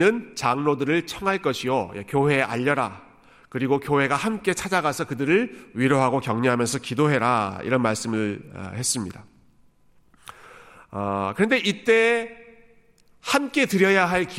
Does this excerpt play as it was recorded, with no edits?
yes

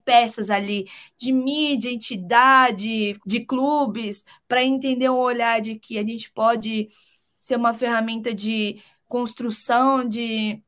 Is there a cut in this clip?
yes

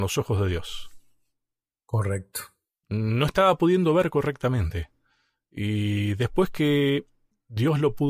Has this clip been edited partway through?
yes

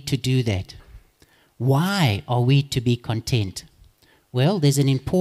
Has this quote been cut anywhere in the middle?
no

